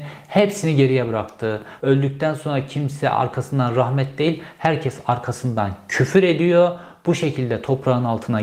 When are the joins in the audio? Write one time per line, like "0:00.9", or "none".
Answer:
0:01.8

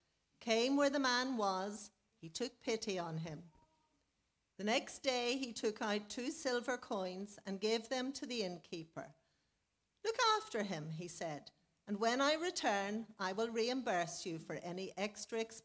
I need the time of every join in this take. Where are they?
0:02.1
0:04.5

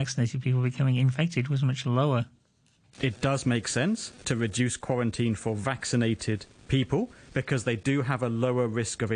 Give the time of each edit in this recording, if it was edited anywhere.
none

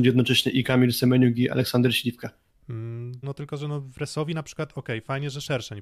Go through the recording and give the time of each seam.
0:03.2

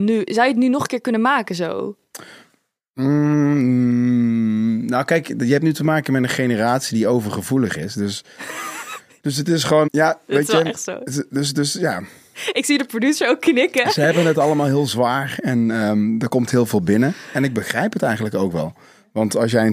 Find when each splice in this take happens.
0:09.9

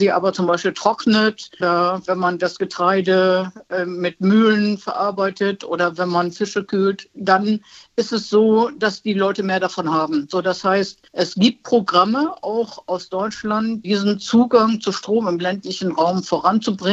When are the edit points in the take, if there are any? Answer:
0:01.6
0:11.1
0:13.8

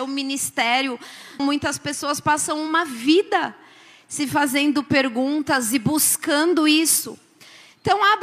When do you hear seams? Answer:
0:01.4

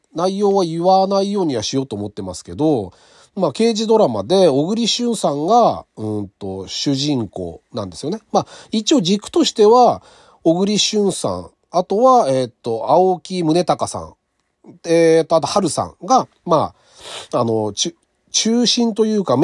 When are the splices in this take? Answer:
none

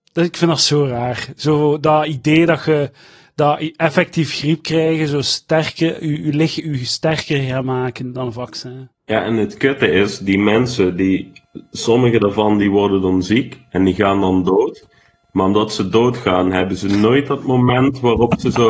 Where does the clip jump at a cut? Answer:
0:08.9

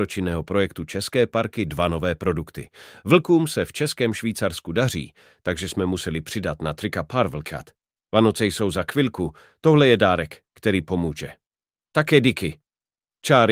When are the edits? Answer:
0:08.1

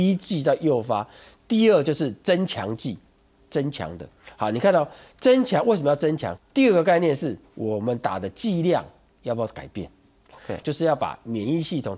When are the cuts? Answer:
0:06.4
0:10.6

